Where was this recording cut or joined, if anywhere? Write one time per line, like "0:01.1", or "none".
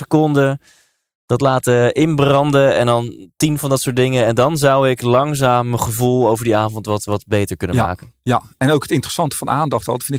none